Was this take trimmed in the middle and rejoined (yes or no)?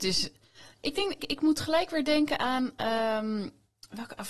yes